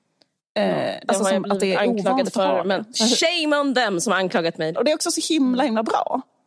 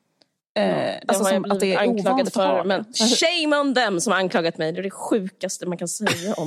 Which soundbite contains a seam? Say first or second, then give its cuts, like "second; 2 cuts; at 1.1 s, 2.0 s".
first; 1 cut; at 4.7 s